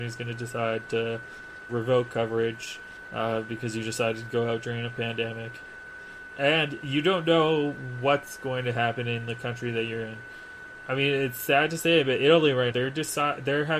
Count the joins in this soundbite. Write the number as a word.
two